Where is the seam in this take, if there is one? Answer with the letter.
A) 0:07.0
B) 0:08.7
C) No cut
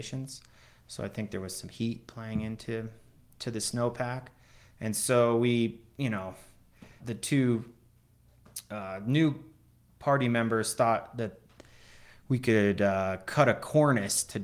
A